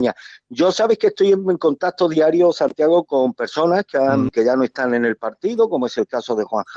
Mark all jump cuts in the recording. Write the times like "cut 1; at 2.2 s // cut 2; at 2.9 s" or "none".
cut 1; at 4.3 s